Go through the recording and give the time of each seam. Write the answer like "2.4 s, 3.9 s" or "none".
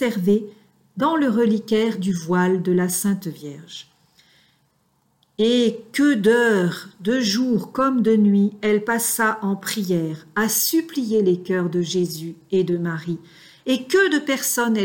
none

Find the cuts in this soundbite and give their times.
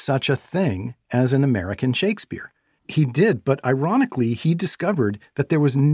2.8 s

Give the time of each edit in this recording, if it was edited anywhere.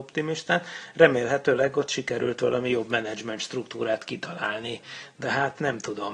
none

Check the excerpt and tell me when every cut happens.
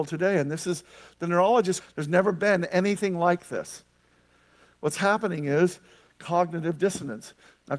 1.8 s

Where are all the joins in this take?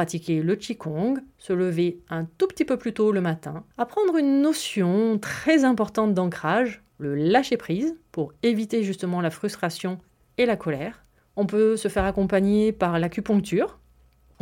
3.7 s

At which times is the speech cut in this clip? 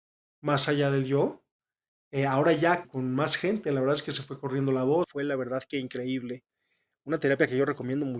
2.8 s, 5.0 s

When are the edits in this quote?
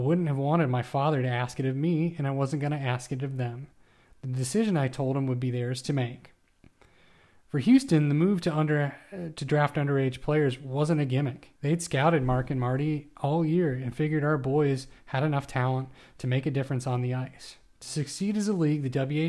11.6 s

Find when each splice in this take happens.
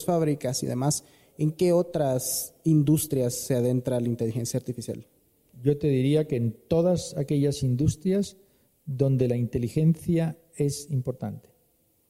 none

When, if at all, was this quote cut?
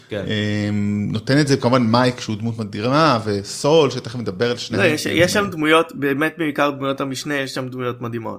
none

